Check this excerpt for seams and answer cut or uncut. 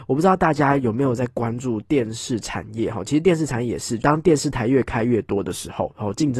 cut